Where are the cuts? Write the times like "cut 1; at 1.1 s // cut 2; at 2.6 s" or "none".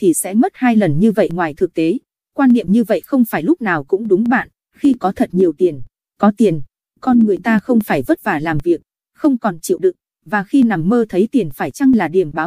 cut 1; at 4.6 s // cut 2; at 10.2 s